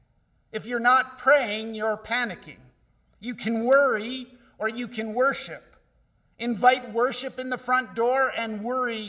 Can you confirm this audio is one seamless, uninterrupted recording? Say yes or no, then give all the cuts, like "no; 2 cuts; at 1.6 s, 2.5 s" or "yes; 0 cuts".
yes; 0 cuts